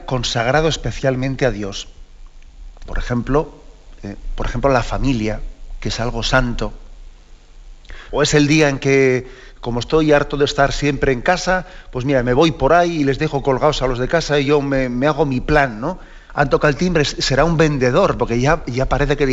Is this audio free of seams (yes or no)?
no